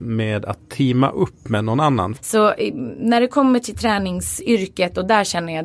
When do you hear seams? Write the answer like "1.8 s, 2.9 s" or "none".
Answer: 2.2 s